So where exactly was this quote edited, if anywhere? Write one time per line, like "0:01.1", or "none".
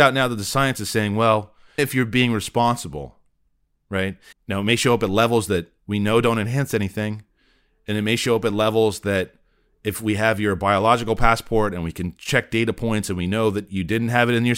0:01.8
0:04.3